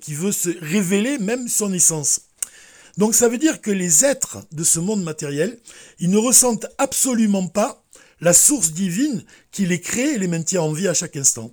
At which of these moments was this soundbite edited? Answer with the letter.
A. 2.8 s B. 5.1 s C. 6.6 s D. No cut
A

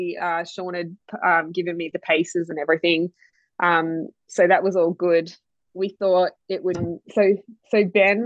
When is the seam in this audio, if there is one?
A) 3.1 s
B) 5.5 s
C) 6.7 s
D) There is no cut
C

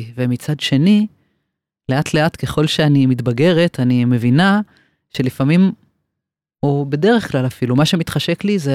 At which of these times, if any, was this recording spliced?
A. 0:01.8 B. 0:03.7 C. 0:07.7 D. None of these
D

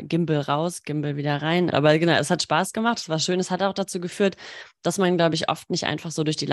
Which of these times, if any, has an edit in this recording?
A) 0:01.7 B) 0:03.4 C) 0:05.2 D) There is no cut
A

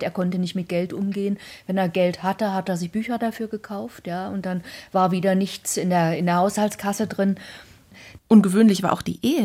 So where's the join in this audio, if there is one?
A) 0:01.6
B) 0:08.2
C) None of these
B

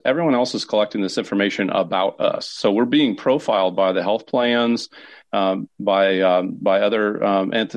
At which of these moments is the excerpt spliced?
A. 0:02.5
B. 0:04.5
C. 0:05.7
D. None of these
D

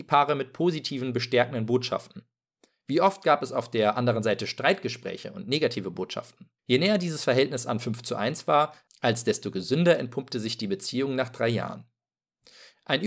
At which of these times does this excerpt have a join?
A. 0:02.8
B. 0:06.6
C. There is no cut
B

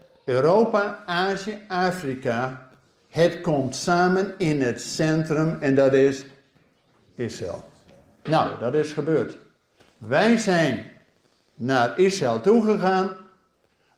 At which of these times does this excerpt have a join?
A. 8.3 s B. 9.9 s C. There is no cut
A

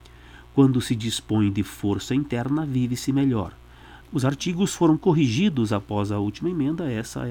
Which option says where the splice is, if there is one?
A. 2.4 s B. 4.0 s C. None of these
B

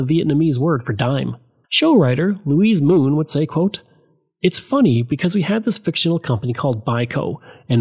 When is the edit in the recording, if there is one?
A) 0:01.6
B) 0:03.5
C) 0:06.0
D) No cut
A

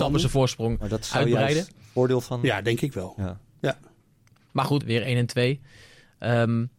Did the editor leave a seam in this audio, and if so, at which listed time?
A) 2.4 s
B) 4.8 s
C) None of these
B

